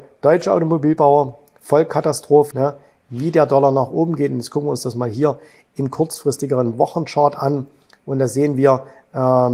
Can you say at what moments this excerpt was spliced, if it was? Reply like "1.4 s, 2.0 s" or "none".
2.5 s